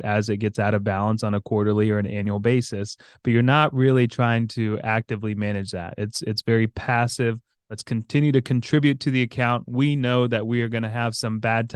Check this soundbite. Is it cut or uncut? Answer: uncut